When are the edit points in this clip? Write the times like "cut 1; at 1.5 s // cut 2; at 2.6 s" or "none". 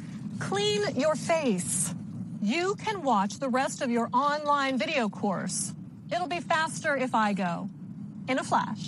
none